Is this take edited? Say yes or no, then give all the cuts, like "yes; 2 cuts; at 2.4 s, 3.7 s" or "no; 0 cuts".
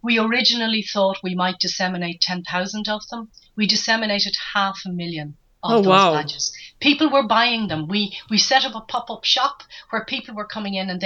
no; 0 cuts